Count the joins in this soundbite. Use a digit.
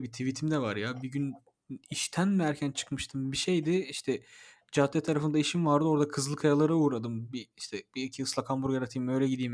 0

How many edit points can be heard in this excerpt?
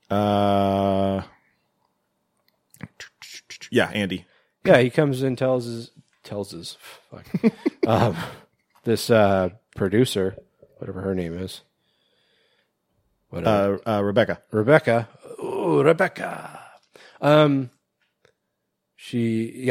0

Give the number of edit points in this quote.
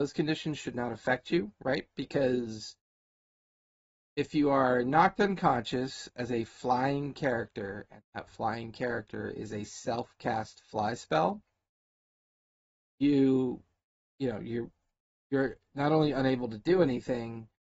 0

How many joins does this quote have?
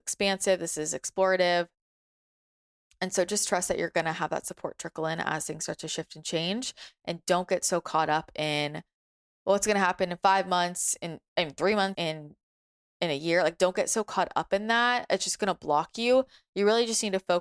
1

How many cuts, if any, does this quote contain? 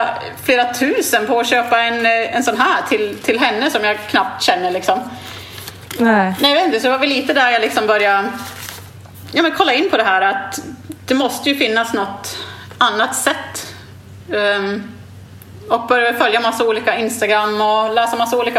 0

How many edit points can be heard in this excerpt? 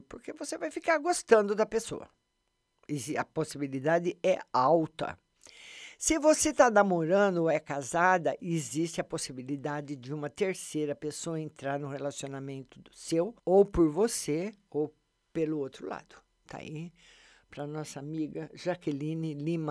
1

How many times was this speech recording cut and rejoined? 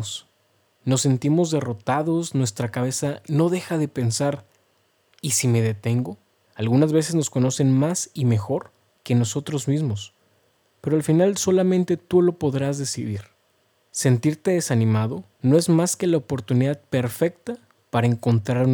2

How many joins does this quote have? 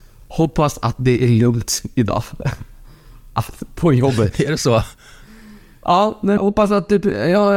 1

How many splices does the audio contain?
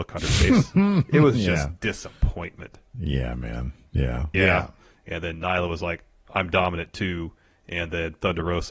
1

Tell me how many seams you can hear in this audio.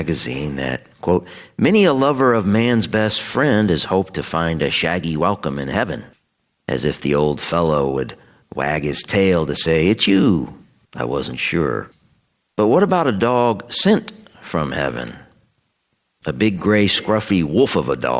1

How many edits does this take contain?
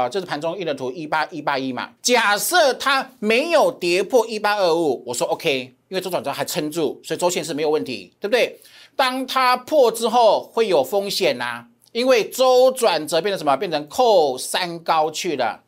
2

